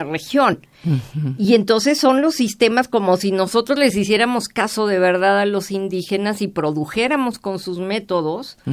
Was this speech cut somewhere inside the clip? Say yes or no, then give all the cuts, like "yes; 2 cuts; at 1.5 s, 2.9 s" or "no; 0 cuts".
no; 0 cuts